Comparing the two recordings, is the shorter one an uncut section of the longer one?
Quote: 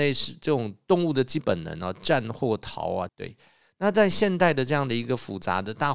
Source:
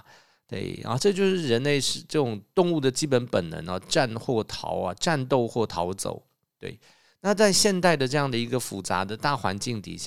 no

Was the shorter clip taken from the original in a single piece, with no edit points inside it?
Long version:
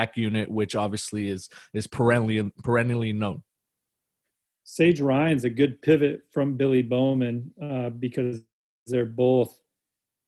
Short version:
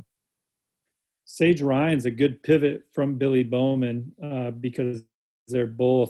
yes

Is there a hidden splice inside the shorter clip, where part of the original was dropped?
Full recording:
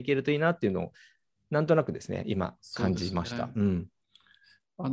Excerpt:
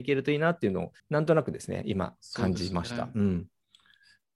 yes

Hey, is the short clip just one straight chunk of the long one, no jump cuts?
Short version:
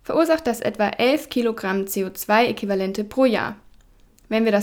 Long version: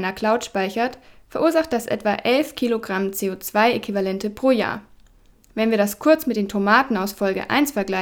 yes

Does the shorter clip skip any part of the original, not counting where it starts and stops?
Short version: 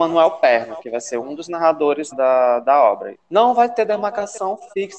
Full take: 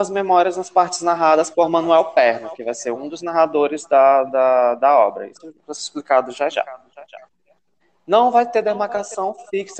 yes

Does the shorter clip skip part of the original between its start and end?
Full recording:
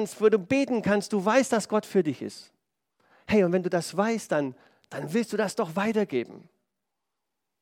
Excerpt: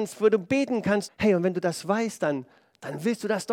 yes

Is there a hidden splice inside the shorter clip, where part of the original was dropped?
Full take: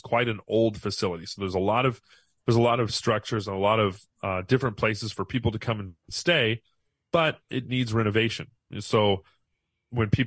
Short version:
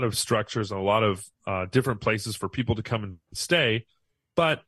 no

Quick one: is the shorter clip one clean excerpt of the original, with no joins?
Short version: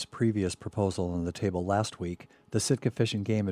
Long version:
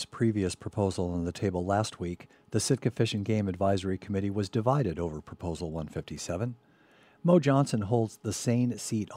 yes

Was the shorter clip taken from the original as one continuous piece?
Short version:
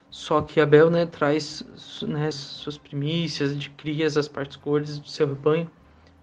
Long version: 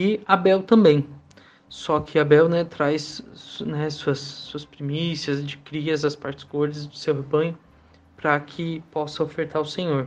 no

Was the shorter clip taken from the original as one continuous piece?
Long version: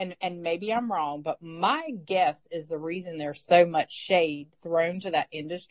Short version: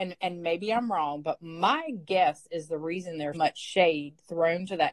no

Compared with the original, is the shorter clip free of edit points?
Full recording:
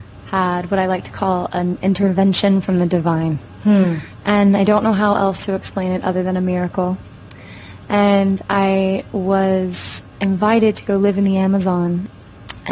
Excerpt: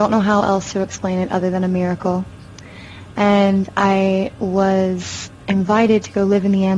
yes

